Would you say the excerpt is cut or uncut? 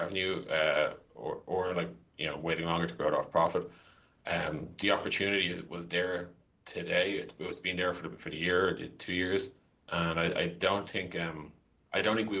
uncut